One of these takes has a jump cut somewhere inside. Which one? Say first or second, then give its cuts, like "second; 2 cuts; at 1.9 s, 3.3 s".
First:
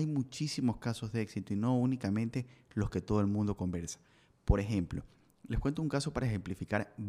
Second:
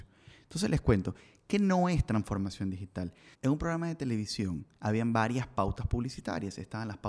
second; 2 cuts; at 3.3 s, 4.7 s